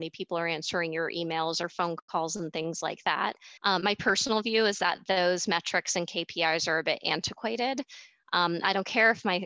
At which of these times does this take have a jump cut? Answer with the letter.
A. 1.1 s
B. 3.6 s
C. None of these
B